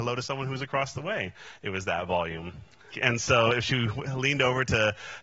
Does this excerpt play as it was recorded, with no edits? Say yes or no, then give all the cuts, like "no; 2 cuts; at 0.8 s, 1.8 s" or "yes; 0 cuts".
no; 1 cut; at 2.9 s